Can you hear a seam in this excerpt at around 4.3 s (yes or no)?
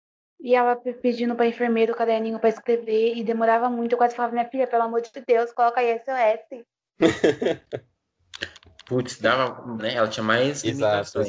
no